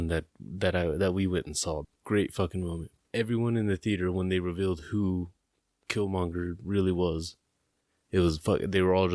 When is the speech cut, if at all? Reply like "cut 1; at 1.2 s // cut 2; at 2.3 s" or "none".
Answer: cut 1; at 1.8 s // cut 2; at 3.0 s